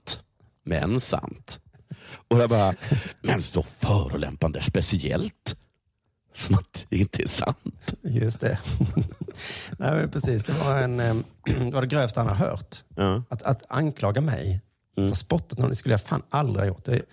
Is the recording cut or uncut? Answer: cut